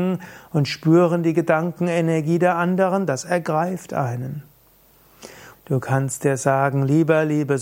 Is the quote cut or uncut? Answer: cut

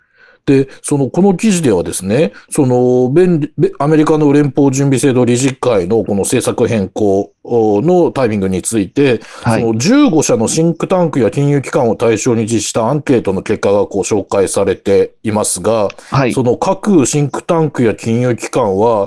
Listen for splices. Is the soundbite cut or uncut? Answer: uncut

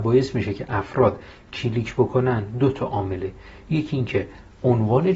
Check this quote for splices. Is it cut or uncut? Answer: uncut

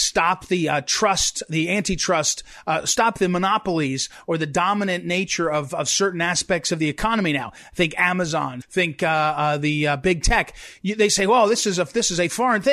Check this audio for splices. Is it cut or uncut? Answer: cut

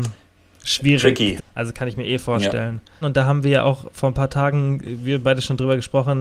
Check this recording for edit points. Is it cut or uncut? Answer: cut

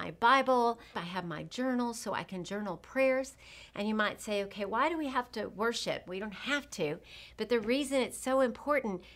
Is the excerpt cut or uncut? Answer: cut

